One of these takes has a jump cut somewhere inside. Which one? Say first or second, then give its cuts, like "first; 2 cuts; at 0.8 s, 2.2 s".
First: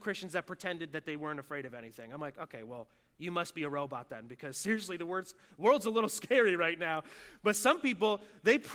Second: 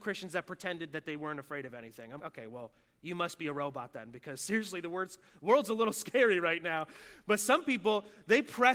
second; 1 cut; at 2.2 s